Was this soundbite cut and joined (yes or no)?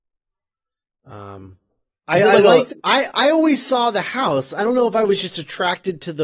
yes